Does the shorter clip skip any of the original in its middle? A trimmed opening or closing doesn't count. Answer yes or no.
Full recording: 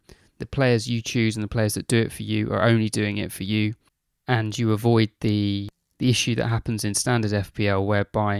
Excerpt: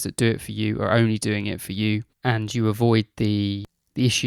yes